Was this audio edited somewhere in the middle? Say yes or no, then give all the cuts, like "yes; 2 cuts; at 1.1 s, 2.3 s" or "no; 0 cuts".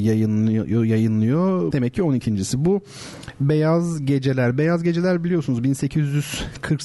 yes; 1 cut; at 1.7 s